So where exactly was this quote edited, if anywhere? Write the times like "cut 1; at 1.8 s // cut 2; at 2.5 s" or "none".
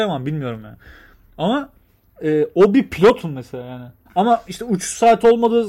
cut 1; at 4.1 s